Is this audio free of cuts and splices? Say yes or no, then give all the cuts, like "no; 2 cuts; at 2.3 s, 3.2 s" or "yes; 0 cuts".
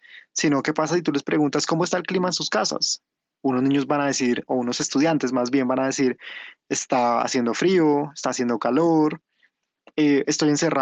yes; 0 cuts